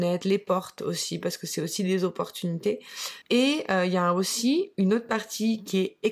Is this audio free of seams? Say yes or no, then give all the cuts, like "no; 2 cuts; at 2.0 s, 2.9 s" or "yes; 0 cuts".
no; 1 cut; at 3.2 s